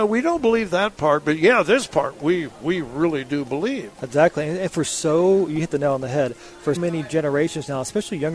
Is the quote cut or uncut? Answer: cut